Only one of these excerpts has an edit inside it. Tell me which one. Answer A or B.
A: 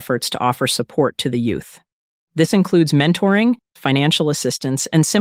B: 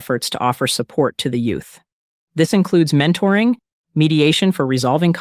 A